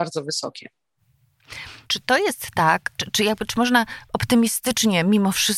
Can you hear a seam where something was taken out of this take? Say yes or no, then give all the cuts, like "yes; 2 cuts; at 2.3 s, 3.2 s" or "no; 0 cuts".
yes; 2 cuts; at 1.8 s, 3.0 s